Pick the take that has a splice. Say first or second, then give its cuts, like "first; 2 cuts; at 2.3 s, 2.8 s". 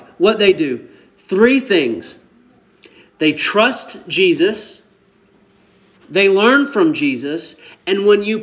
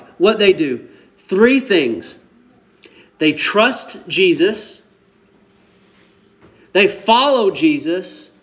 first; 1 cut; at 6.0 s